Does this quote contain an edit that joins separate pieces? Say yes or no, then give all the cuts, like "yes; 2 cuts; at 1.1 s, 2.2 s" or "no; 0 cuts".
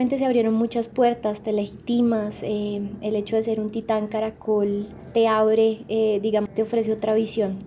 yes; 1 cut; at 6.5 s